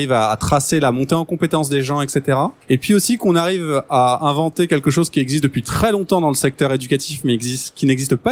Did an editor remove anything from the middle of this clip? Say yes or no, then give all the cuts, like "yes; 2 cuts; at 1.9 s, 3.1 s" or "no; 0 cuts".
yes; 1 cut; at 2.6 s